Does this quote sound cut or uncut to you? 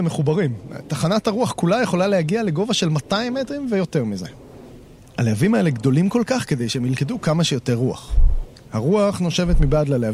uncut